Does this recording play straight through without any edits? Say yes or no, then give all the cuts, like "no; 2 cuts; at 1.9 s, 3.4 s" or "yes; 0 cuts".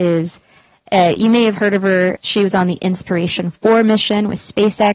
no; 1 cut; at 2.2 s